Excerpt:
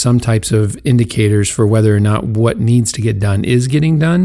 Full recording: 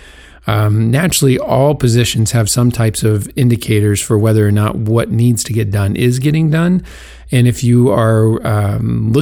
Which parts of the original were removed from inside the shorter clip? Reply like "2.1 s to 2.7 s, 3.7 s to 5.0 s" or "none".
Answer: none